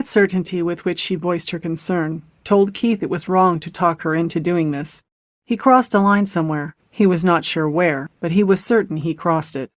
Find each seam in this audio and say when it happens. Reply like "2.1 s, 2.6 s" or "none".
none